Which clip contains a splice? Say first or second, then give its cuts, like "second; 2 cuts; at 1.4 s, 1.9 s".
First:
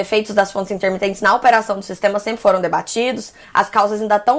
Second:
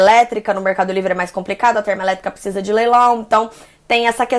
first; 1 cut; at 3.4 s